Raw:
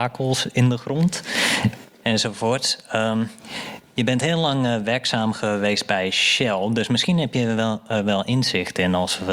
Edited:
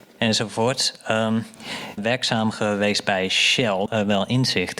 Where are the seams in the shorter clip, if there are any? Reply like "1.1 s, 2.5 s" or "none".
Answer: 2.0 s, 3.9 s